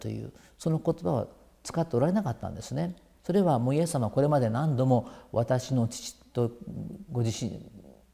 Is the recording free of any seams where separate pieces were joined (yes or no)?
no